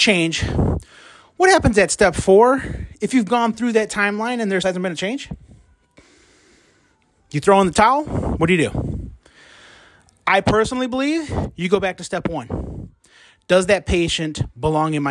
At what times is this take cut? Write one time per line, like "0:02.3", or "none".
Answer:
0:04.6